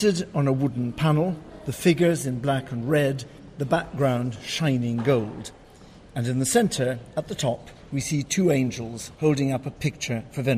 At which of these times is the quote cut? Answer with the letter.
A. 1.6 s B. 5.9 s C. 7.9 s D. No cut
D